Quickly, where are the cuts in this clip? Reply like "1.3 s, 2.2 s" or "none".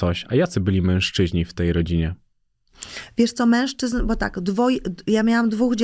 none